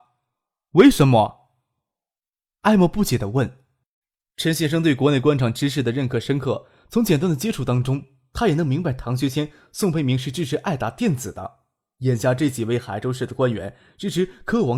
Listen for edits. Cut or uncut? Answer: uncut